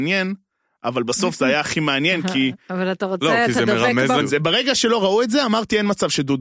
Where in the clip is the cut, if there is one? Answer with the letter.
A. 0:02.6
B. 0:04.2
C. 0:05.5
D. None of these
B